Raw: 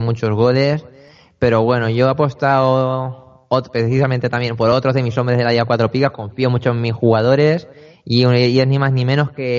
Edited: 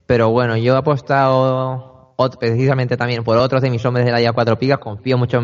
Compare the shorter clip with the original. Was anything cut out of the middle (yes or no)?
no